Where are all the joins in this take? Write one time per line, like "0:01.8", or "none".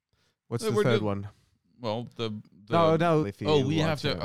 0:03.2